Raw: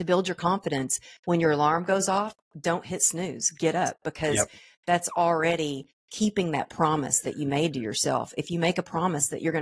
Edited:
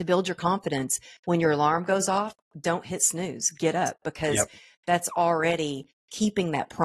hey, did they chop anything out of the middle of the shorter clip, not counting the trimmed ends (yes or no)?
no